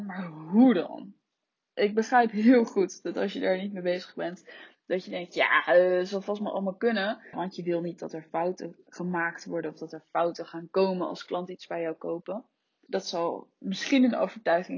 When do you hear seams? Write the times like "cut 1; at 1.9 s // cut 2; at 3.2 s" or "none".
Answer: cut 1; at 7.3 s // cut 2; at 12.9 s